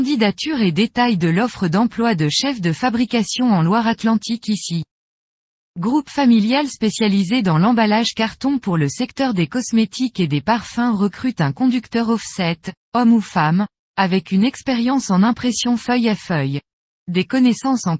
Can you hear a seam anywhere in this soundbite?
no; 0 cuts

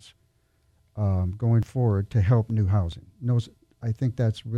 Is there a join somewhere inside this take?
no; 0 cuts

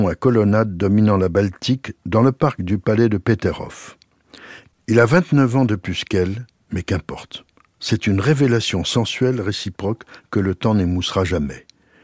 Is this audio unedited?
yes; 0 cuts

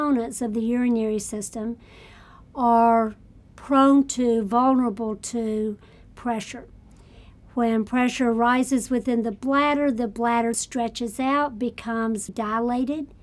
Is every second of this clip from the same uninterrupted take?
no; 2 cuts; at 10.5 s, 12.3 s

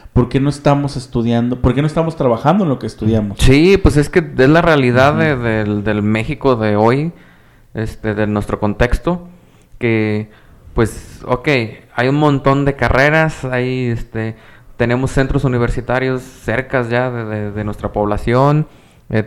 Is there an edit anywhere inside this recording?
no; 0 cuts

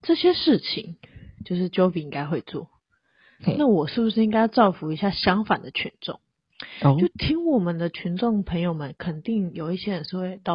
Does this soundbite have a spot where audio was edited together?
no; 0 cuts

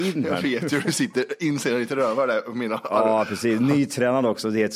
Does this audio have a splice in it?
no; 0 cuts

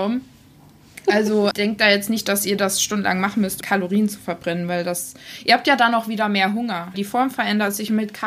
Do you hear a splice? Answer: yes; 3 cuts; at 1.5 s, 3.6 s, 6.9 s

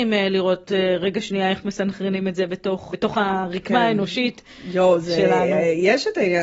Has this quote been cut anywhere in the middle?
yes; 1 cut; at 2.9 s

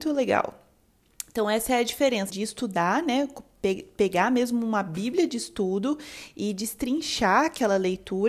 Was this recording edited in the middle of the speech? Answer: yes; 1 cut; at 2.3 s

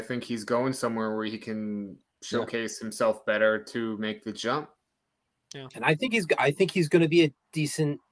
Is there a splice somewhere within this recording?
no; 0 cuts

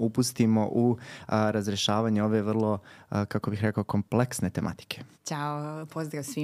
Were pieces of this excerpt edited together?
yes; 1 cut; at 5.1 s

